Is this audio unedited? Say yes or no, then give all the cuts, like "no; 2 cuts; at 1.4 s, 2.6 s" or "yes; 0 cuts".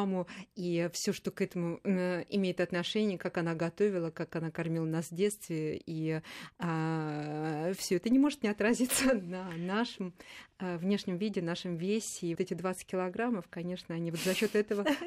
no; 1 cut; at 12.4 s